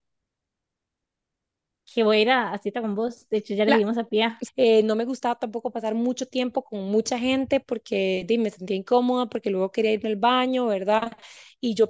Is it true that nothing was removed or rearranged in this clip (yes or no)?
no